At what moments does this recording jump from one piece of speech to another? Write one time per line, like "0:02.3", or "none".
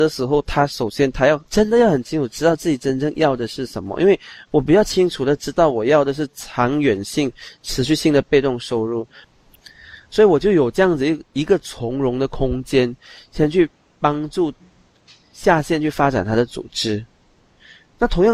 0:01.4